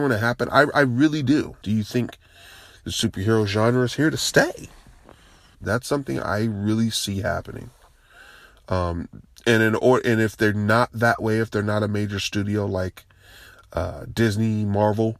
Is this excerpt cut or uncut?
cut